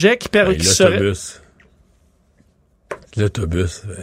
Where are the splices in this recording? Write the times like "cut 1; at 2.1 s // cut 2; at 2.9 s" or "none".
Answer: cut 1; at 3.1 s